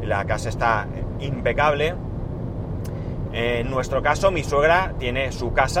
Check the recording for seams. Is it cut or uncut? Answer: cut